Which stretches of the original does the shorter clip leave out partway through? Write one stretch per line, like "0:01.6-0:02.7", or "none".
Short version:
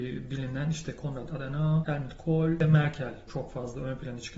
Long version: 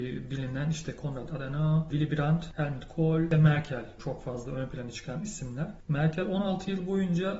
0:01.8-0:02.6